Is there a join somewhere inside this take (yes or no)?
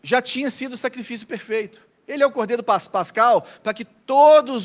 no